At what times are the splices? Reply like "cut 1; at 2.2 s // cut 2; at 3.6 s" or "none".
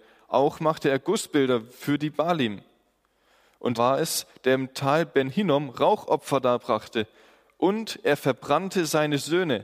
cut 1; at 3.7 s